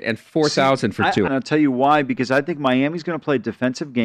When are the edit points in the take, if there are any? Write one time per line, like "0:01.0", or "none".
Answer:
0:01.3